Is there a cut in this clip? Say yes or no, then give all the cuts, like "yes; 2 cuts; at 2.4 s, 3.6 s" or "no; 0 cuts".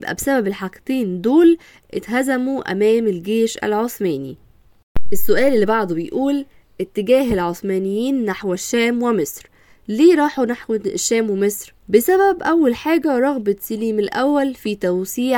yes; 1 cut; at 11.8 s